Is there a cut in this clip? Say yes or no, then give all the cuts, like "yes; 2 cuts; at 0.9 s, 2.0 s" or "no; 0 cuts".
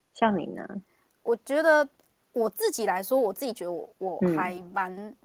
no; 0 cuts